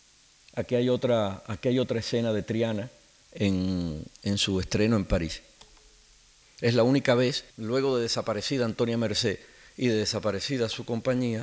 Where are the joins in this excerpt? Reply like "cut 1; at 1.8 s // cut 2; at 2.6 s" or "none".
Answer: cut 1; at 6.4 s // cut 2; at 7.5 s